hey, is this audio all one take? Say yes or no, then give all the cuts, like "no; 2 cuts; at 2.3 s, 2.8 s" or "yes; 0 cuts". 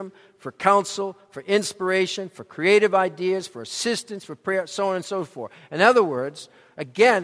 yes; 0 cuts